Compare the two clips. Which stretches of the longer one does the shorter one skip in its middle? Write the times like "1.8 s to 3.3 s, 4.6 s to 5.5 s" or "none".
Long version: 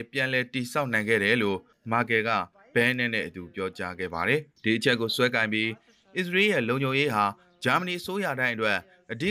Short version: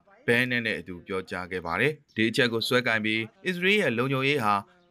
5.8 s to 6.1 s